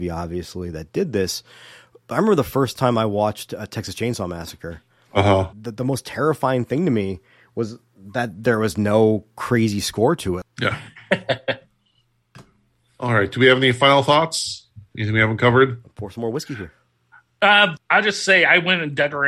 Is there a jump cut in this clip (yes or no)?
yes